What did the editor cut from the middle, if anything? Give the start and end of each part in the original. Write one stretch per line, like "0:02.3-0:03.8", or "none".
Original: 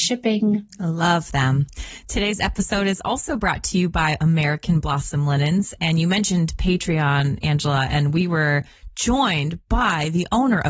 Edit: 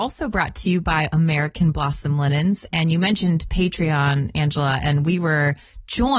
none